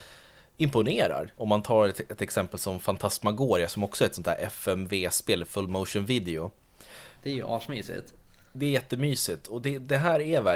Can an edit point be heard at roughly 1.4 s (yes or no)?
yes